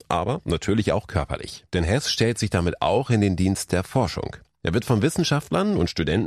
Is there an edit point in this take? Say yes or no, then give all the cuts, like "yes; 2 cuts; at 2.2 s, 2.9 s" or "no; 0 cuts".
yes; 1 cut; at 1.7 s